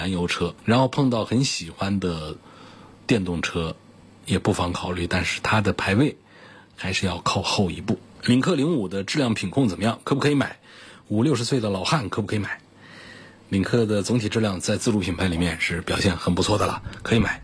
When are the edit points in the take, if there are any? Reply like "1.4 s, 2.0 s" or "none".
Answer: none